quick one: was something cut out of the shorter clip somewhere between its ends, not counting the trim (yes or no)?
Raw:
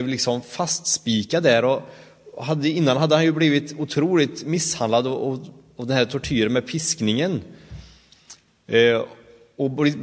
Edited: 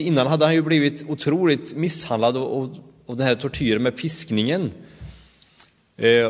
no